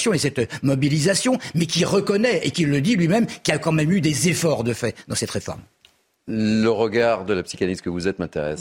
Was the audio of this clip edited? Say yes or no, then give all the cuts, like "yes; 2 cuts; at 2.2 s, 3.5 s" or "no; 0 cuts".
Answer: no; 0 cuts